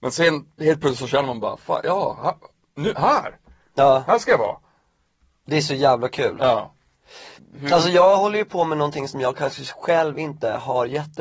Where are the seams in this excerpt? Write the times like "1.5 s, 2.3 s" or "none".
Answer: 7.4 s